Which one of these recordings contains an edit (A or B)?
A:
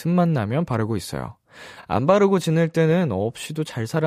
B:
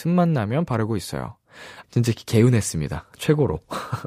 B